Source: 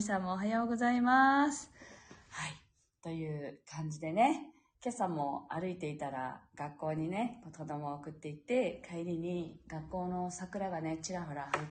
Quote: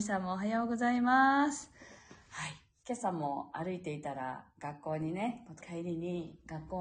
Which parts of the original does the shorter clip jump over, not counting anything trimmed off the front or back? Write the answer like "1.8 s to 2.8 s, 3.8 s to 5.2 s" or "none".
2.8 s to 4.8 s, 7.6 s to 8.8 s